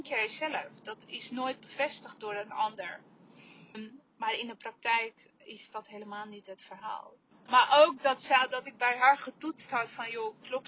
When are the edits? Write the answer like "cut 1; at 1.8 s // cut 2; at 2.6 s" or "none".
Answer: cut 1; at 3.7 s // cut 2; at 7.3 s